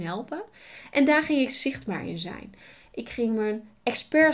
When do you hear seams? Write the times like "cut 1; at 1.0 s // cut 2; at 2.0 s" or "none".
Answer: none